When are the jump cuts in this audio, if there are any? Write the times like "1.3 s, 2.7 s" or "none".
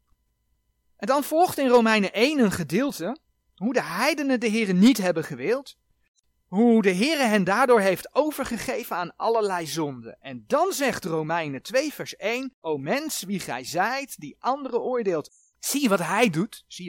12.6 s, 15.5 s